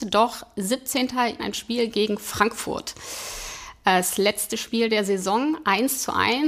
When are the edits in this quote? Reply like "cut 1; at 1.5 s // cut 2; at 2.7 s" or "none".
cut 1; at 1.4 s